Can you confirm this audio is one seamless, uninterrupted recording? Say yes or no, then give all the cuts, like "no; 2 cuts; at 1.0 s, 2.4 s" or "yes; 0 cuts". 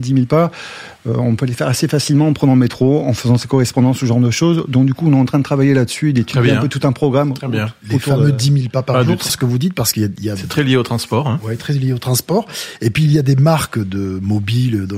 no; 1 cut; at 9.3 s